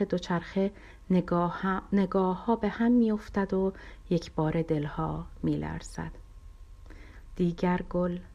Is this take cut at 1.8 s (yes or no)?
no